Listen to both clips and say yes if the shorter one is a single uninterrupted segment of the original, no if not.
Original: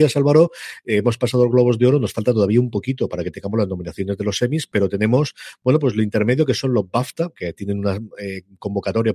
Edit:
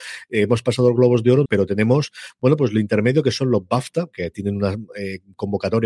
no